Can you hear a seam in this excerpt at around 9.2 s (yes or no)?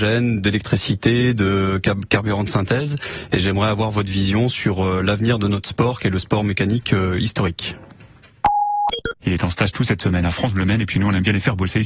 yes